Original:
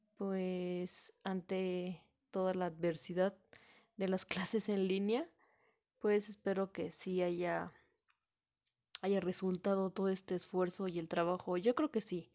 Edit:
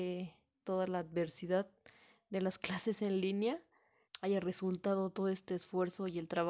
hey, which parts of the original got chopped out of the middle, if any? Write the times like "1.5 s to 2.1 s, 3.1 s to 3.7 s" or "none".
5.7 s to 8.8 s